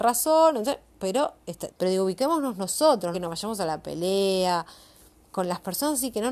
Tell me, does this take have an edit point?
yes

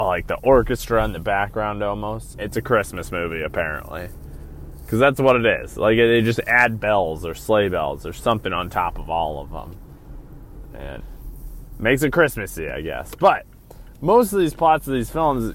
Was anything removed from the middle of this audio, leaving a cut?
yes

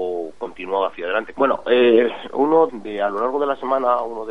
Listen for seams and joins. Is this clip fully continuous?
no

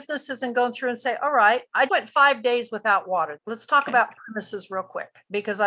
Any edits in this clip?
yes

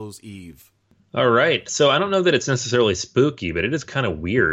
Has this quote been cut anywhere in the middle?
no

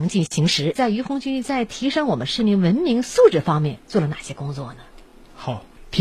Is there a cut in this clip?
no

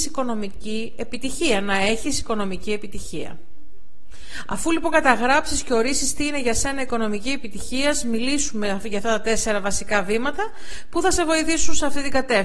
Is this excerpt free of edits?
yes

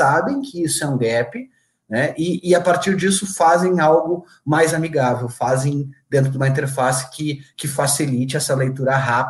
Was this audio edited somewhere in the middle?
no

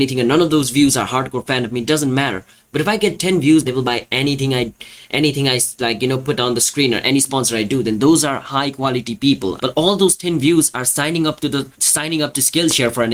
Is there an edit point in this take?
yes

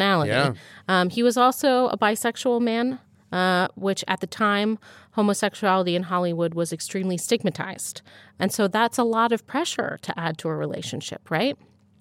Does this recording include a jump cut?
no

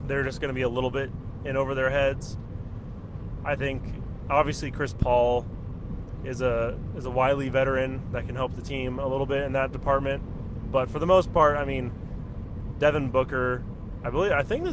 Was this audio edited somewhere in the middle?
no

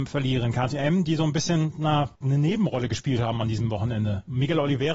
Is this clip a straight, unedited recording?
no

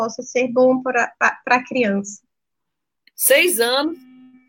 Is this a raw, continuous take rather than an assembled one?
no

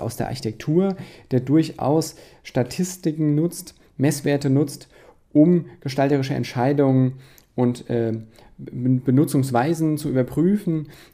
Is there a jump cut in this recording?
no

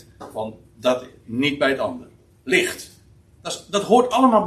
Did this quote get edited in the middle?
yes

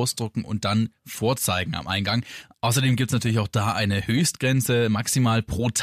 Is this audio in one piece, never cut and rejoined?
yes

